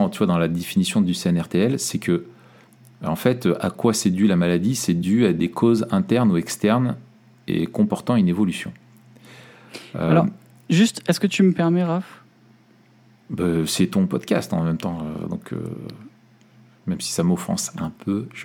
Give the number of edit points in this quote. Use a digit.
0